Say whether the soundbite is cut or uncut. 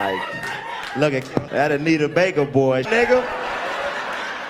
cut